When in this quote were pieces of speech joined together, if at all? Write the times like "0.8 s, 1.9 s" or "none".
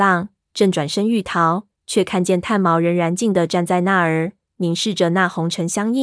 3.2 s